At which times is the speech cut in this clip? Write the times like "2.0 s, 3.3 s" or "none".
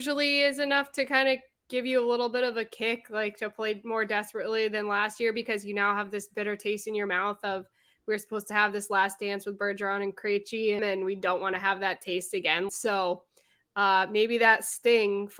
10.8 s, 12.7 s

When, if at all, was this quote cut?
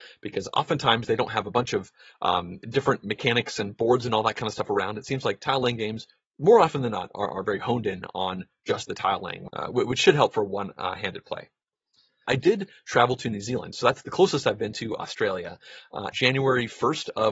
12.2 s, 16.1 s

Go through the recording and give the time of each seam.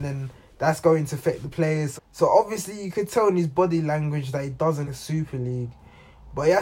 2.0 s, 4.8 s

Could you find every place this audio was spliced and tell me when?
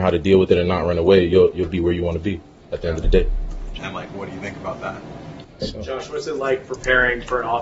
3.8 s, 5.4 s

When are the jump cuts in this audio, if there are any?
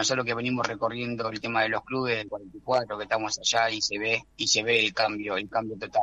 2.3 s, 4.3 s

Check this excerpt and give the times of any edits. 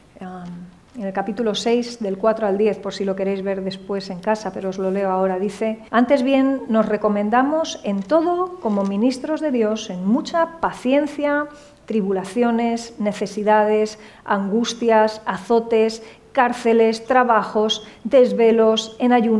5.9 s, 17.1 s

